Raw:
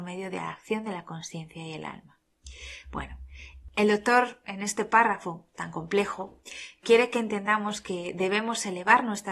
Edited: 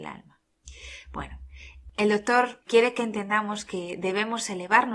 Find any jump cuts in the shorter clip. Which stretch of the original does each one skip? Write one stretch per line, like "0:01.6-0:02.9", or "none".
0:04.4-0:06.8